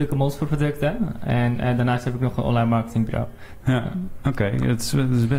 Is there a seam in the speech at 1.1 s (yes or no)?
no